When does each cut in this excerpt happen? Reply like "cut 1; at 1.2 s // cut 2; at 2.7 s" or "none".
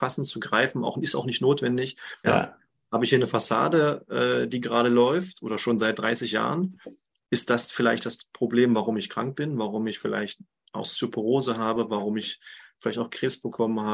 cut 1; at 2.2 s